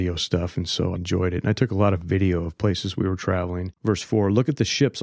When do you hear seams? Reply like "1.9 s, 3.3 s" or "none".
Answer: 1.0 s, 3.8 s